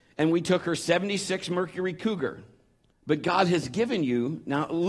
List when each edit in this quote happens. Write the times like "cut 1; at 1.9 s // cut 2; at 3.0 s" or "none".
cut 1; at 2.9 s

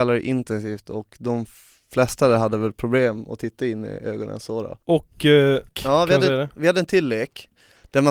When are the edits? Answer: cut 1; at 5.7 s

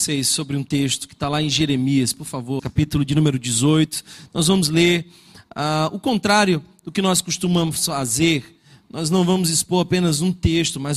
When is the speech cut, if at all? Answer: cut 1; at 2.6 s

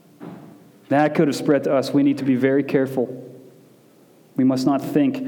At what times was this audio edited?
none

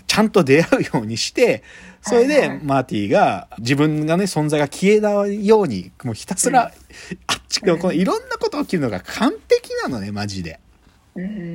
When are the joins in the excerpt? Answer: cut 1; at 3.6 s // cut 2; at 7.6 s

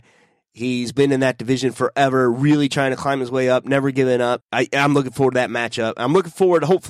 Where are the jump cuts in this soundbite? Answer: cut 1; at 4.4 s

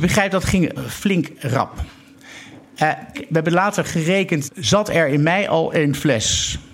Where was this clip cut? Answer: cut 1; at 3.1 s // cut 2; at 4.5 s

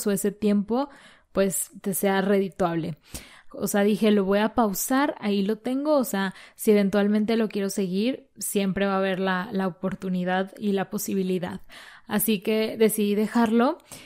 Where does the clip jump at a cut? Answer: cut 1; at 3.5 s

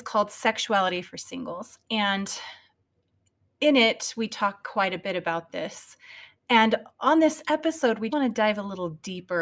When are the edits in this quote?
cut 1; at 8.1 s

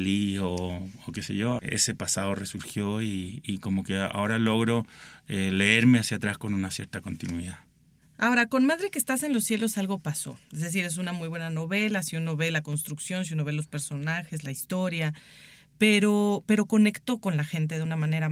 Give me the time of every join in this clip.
cut 1; at 1.6 s

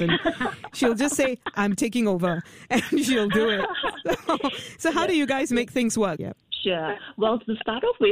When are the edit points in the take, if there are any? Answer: cut 1; at 6.2 s

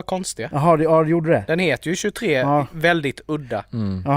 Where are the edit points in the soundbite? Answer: none

